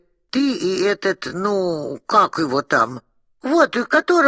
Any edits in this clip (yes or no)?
no